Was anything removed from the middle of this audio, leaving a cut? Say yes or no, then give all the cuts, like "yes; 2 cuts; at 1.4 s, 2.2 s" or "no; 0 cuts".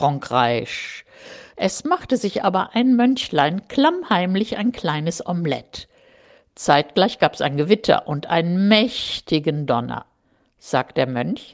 yes; 1 cut; at 1.5 s